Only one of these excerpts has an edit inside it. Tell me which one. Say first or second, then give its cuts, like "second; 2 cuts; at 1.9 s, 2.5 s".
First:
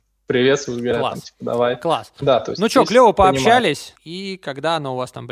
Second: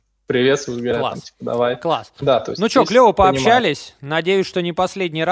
first; 1 cut; at 4.0 s